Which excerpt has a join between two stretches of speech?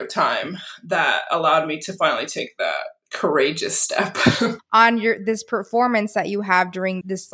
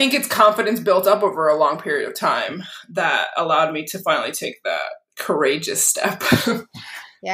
first; 1 cut; at 4.6 s

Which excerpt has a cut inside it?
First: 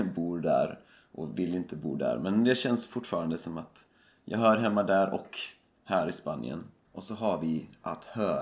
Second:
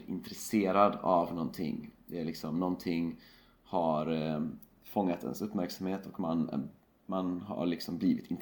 first; 1 cut; at 6.8 s

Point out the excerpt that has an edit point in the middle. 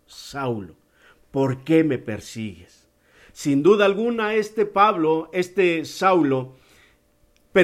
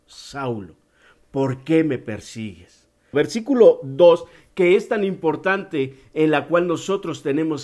second; 1 cut; at 3.1 s

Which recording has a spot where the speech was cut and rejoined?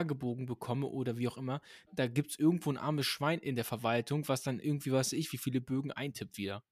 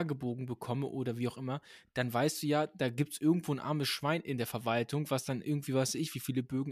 first; 1 cut; at 1.9 s

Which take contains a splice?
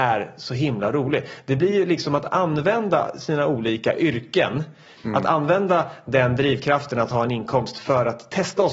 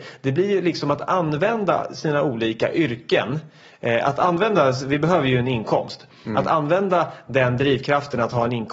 first; 1 cut; at 5.0 s

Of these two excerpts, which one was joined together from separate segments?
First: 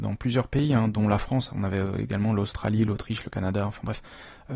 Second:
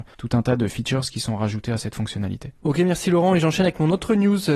second; 1 cut; at 2.6 s

